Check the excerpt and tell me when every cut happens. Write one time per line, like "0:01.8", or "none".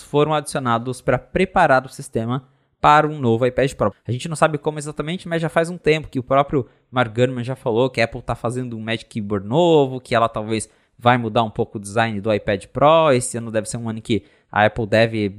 0:03.9